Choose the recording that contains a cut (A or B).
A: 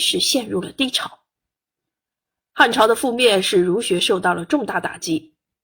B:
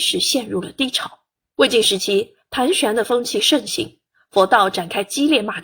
B